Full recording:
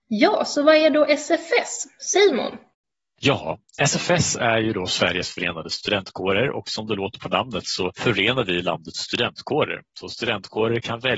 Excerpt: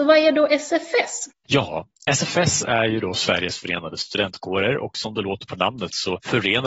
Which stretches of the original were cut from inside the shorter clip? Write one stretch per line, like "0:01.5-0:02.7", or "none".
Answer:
0:01.9-0:03.0